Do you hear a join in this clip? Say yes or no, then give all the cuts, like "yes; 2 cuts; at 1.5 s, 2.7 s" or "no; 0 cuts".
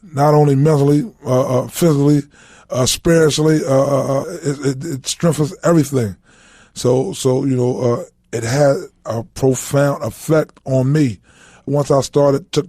no; 0 cuts